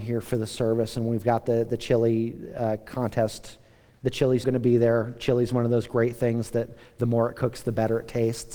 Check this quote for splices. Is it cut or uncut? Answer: cut